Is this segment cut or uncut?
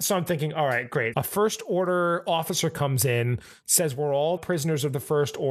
cut